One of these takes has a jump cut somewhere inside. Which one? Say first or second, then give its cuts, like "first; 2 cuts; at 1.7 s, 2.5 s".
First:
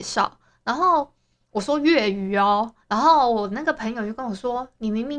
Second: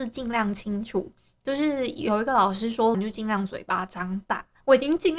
second; 1 cut; at 2.9 s